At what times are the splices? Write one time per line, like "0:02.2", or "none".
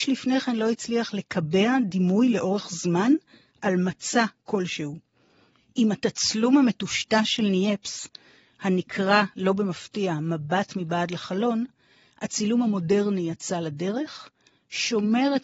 none